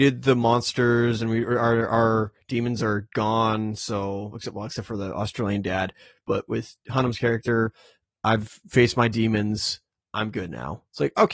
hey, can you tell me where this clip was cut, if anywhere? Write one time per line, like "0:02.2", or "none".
none